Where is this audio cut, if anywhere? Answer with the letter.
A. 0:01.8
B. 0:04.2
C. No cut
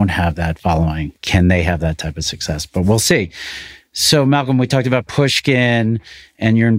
C